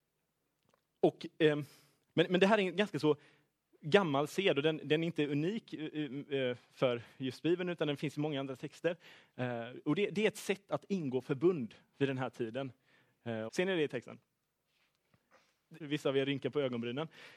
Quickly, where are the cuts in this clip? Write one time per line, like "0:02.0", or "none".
0:13.5
0:15.8